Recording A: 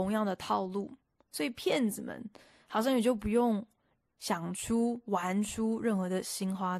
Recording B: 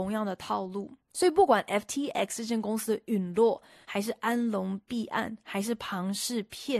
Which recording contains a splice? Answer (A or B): B